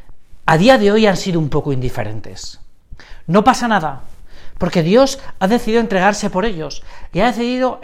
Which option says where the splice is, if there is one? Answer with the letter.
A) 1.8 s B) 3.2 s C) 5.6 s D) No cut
D